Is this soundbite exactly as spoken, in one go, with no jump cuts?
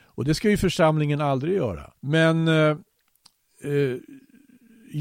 no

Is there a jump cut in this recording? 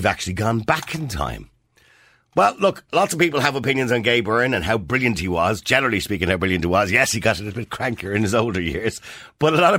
no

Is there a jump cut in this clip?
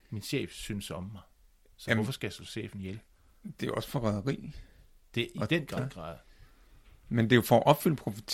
yes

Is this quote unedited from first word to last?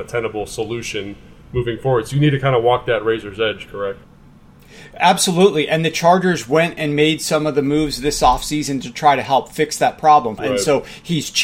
no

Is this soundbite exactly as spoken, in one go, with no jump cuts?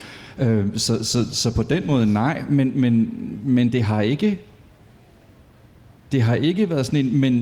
yes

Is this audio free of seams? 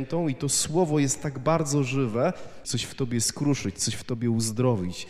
no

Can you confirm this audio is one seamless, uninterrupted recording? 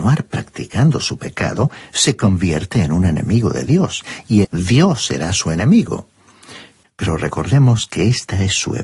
no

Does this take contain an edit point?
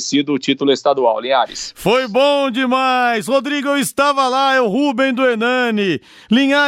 no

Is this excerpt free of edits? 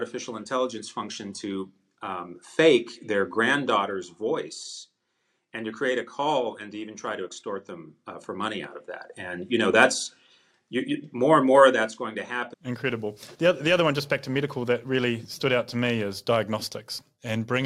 no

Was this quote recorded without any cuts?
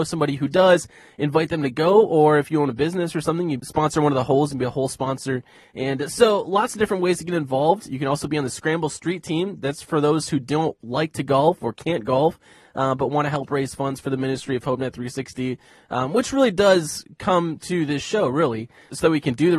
yes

